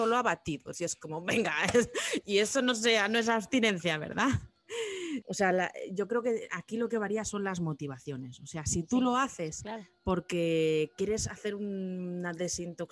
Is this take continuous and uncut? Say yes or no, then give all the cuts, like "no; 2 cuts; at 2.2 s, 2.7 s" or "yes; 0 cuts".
no; 1 cut; at 5.2 s